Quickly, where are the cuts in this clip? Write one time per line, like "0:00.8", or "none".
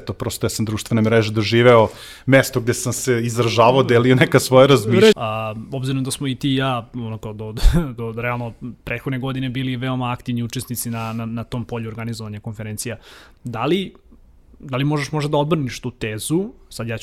0:05.1

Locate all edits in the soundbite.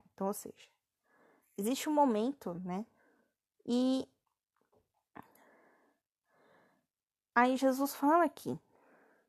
0:03.5

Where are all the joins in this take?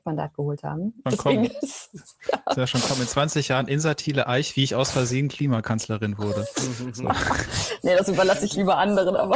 0:01.0

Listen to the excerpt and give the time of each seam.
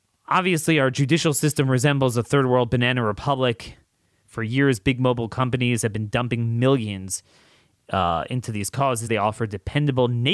0:04.2
0:09.1

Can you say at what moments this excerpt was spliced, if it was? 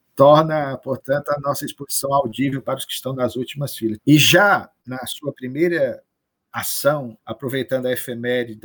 0:04.0
0:07.2

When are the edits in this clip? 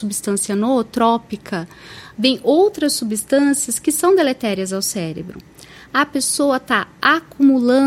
0:02.1

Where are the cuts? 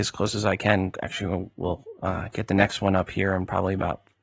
none

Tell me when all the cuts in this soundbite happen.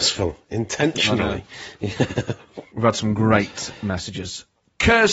none

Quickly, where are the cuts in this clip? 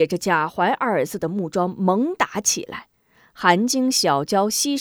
none

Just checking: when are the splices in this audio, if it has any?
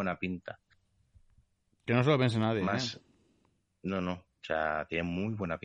none

